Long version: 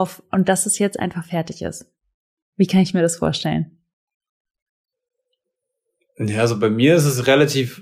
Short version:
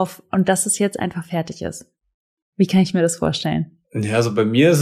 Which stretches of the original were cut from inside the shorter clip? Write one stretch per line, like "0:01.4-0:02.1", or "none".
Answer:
0:03.8-0:06.1

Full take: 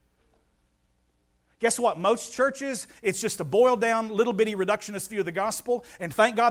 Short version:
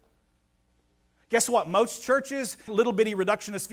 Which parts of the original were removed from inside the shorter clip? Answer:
0:03.0-0:04.1

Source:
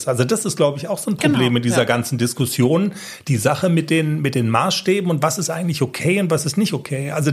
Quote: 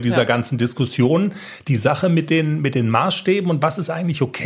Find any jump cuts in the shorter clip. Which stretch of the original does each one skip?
none

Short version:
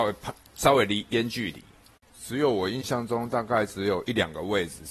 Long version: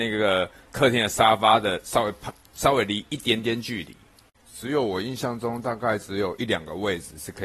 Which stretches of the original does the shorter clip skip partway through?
0:03.1-0:03.4

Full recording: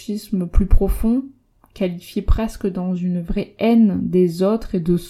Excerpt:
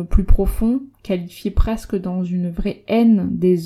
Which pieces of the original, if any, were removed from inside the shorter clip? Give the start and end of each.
0:01.4-0:01.6

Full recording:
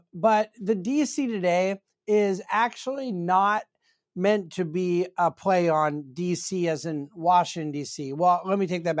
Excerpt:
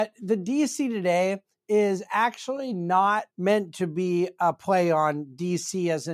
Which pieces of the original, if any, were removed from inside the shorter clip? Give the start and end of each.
0:03.7-0:04.1

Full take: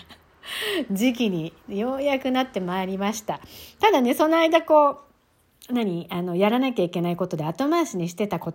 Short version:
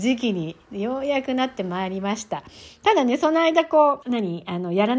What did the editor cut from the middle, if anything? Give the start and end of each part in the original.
0:05.0-0:05.7

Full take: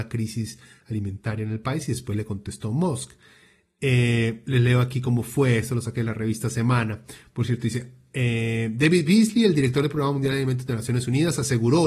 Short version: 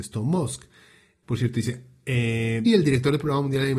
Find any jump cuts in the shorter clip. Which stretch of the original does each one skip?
0:03.7-0:07.3
0:08.7-0:09.4

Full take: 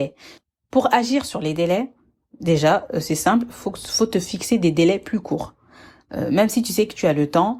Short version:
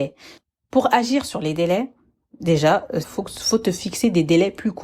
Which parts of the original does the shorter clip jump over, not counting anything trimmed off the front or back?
0:03.0-0:03.5

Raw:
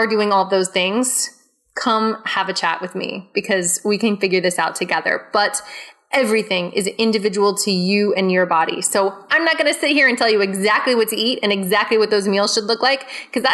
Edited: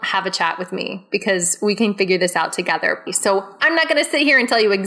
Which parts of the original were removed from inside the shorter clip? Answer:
0:05.3-0:08.8

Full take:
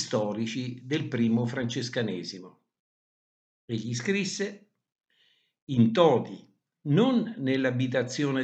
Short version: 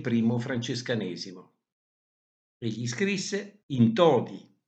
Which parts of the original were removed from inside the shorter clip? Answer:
0:04.7-0:05.6

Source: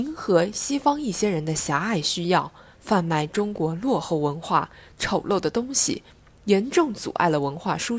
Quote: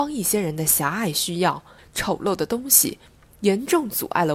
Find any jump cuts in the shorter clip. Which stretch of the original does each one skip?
0:02.7-0:04.8

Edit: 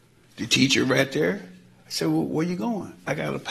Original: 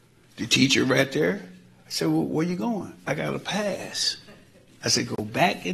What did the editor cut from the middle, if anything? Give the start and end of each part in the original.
none

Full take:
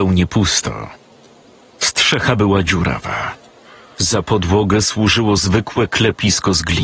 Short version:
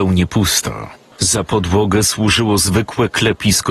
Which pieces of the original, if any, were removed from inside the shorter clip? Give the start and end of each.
0:01.1-0:03.9

